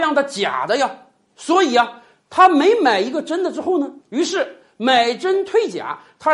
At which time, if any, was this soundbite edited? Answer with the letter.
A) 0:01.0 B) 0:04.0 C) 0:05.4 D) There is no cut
B